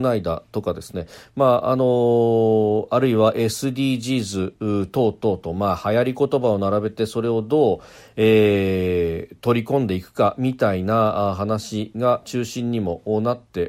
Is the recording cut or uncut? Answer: uncut